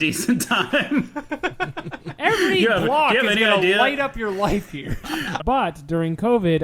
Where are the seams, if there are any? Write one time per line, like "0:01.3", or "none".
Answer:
0:05.4